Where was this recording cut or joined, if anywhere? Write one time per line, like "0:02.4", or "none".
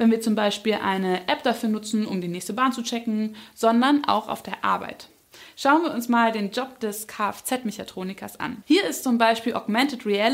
none

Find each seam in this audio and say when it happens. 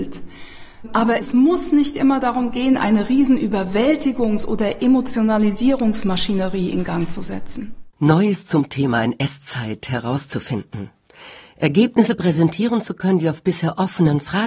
none

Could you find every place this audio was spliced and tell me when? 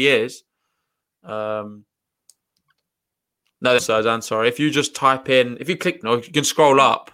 0:03.8
0:06.0

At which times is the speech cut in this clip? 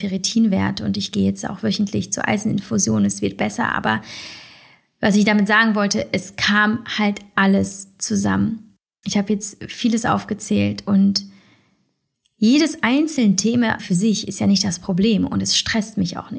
0:13.8

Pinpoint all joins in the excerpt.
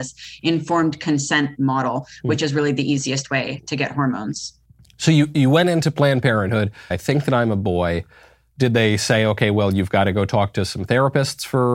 0:06.9

